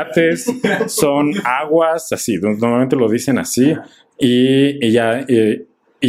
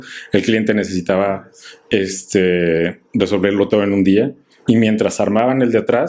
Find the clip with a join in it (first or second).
second